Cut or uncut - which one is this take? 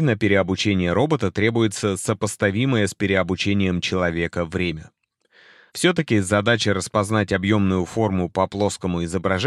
cut